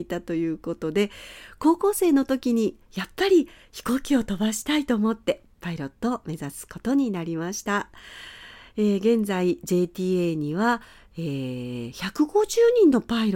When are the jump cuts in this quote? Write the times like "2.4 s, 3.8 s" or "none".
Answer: none